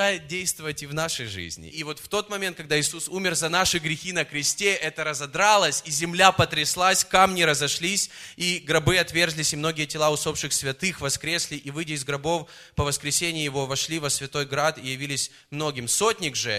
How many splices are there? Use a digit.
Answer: 1